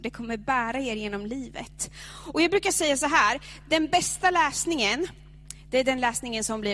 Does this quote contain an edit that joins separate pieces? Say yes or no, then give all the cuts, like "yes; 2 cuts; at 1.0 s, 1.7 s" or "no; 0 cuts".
no; 0 cuts